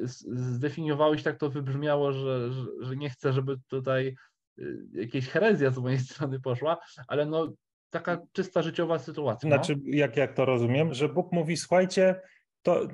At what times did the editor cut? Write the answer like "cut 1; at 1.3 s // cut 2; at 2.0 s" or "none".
cut 1; at 9.4 s // cut 2; at 10.9 s